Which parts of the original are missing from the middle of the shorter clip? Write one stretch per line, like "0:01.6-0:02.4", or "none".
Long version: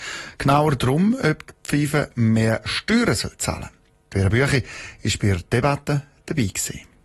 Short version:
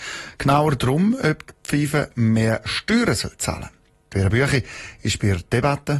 none